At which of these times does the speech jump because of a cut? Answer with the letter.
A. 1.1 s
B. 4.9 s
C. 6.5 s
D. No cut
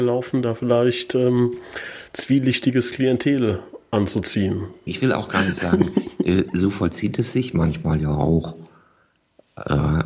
B